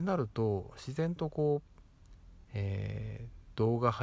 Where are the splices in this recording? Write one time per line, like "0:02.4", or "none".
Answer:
none